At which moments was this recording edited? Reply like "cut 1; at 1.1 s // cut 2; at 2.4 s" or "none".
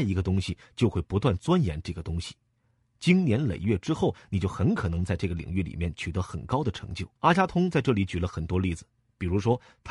cut 1; at 7.2 s